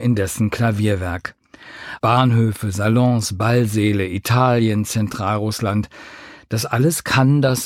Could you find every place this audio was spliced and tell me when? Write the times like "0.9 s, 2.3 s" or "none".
2.0 s